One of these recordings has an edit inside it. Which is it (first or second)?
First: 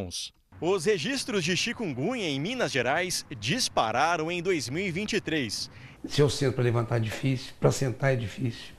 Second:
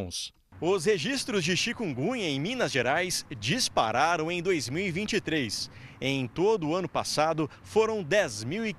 first